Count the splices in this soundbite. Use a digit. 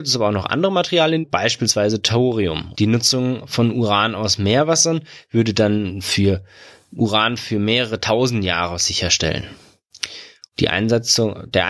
3